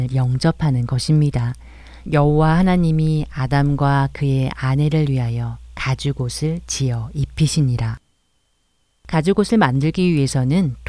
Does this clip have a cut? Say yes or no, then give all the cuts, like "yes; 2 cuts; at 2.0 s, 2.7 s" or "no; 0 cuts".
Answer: yes; 1 cut; at 2.1 s